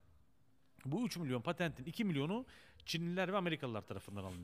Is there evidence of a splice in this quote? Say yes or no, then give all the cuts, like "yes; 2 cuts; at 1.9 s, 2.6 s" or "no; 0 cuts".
no; 0 cuts